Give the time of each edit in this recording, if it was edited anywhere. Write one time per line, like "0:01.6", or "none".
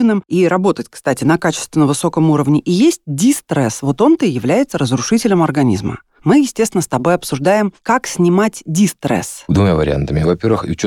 none